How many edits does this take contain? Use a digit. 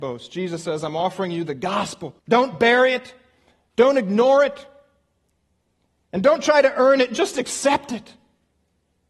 1